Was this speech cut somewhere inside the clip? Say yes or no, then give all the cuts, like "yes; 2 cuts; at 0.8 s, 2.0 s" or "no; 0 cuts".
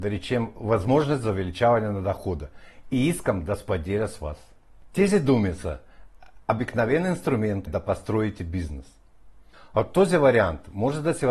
yes; 2 cuts; at 7.7 s, 9.5 s